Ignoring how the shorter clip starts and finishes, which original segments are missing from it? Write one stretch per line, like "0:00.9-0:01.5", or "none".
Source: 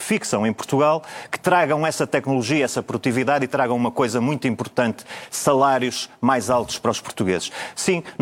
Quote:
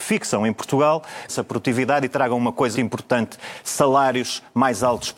0:01.3-0:02.7
0:04.1-0:04.4

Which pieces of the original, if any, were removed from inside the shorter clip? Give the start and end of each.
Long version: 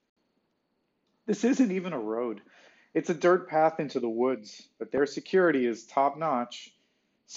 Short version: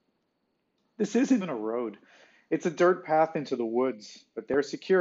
0:01.7-0:01.8

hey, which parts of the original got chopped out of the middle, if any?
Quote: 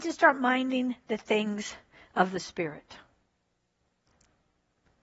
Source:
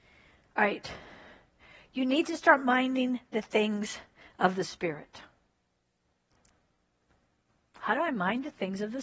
none

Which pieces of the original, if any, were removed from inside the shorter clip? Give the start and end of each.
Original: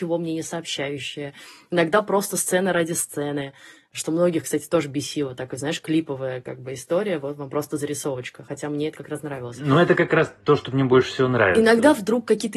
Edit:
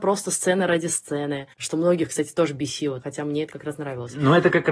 0:03.6-0:03.9
0:05.4-0:08.5

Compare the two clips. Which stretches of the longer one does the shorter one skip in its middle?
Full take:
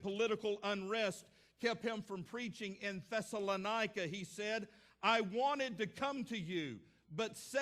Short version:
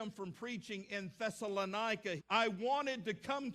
0:04.1-0:04.9

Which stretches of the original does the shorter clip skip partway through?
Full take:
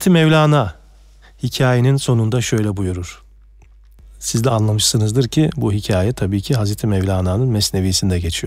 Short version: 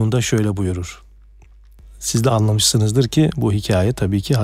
none

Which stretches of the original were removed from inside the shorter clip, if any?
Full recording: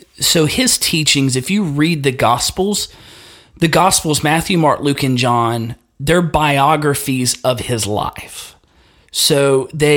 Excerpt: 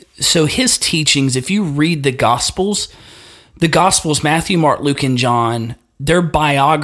none

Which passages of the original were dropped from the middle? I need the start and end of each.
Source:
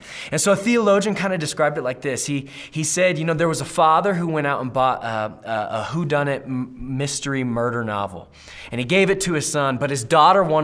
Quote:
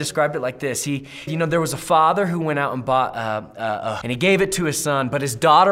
0:02.7-0:03.1
0:05.9-0:08.7

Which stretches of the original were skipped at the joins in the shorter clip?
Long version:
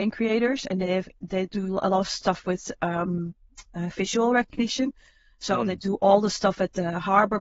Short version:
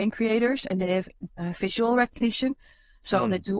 0:01.3-0:03.6

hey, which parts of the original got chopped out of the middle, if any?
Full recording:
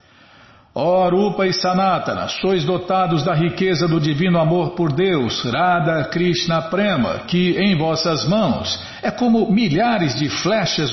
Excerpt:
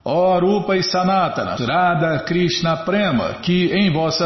0:02.3-0:05.4

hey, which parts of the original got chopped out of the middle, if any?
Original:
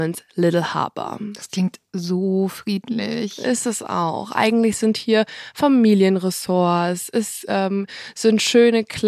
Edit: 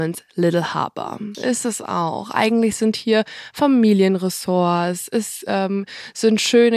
0:01.3-0:03.4

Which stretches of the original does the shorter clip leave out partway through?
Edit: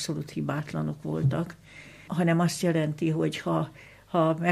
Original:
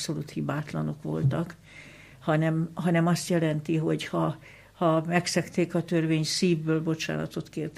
0:02.1-0:02.7

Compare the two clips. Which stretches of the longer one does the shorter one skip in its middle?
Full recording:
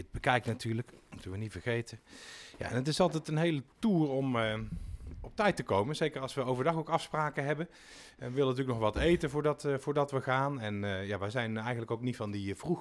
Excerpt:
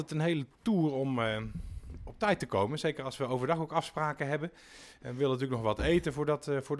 none

